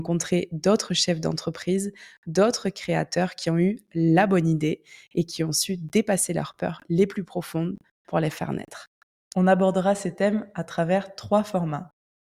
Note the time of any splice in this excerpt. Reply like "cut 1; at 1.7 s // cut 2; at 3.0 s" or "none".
cut 1; at 9.3 s